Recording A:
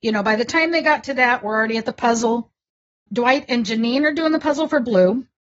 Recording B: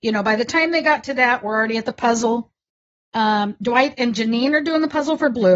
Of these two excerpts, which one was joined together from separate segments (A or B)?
A